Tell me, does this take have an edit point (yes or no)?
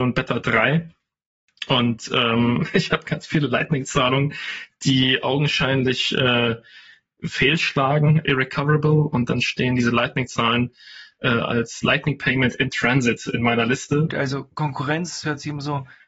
yes